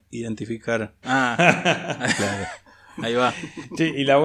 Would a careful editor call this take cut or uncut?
cut